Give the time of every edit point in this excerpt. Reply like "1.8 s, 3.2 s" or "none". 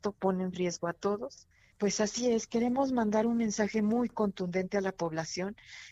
1.7 s